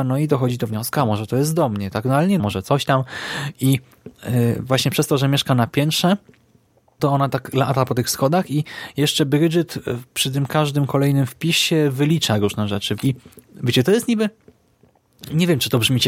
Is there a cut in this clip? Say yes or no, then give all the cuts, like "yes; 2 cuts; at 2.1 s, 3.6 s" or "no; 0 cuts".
yes; 2 cuts; at 2.4 s, 13.0 s